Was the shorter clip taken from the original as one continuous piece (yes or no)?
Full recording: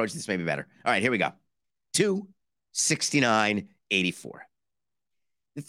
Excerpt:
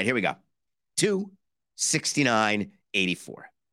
yes